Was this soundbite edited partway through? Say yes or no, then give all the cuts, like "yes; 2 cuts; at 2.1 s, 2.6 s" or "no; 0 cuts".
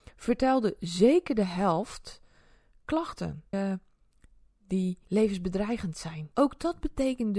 yes; 3 cuts; at 3.5 s, 5.0 s, 6.3 s